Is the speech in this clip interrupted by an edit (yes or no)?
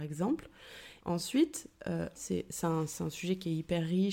yes